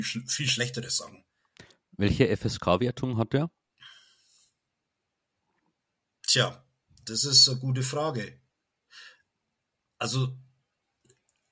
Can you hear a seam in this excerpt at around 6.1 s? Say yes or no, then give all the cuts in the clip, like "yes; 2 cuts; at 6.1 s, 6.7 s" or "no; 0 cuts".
no; 0 cuts